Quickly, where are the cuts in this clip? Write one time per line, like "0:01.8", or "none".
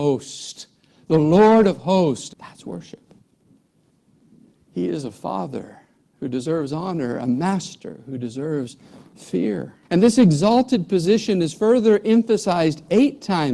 0:02.3
0:09.8